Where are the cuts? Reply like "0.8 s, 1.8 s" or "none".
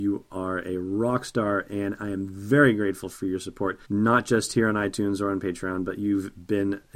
3.8 s